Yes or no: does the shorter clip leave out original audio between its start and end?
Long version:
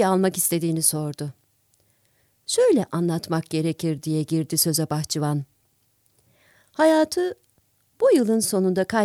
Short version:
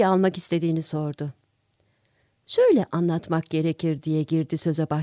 no